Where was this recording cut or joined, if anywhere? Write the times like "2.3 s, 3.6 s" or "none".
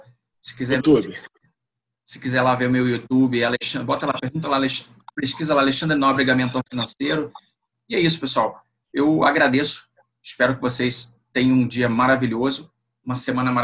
7.7 s